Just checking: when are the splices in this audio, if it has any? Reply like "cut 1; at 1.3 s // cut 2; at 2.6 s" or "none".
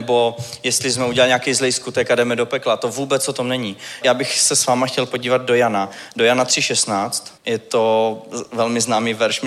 cut 1; at 4.0 s // cut 2; at 7.4 s